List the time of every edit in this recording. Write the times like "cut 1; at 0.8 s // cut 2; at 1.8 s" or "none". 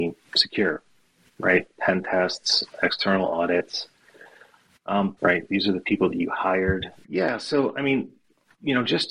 cut 1; at 5.2 s // cut 2; at 7.0 s